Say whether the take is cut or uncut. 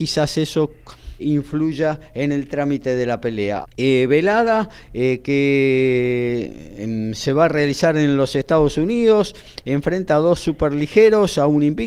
cut